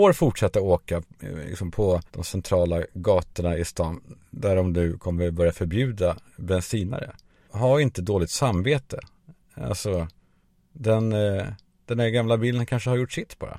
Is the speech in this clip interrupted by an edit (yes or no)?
yes